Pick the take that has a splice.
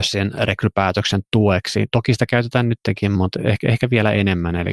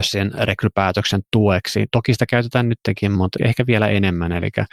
second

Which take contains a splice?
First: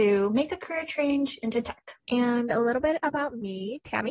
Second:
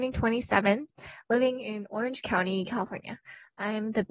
first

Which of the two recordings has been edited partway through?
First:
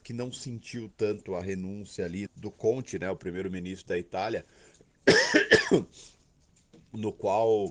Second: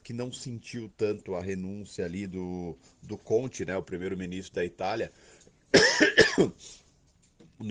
first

